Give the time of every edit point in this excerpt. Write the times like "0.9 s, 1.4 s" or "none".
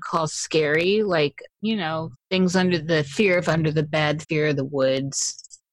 1.6 s, 4.2 s